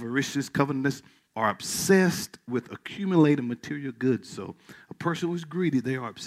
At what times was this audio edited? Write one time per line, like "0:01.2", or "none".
0:01.3